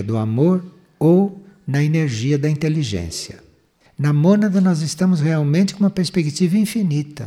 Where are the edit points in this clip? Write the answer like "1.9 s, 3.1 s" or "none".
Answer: 3.9 s